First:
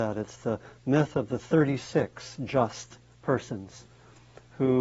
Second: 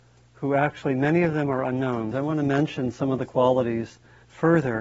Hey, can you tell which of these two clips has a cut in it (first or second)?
second